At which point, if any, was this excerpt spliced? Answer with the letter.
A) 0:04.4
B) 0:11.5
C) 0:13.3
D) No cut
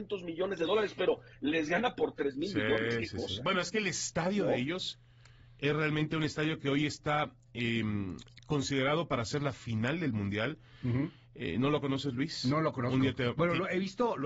D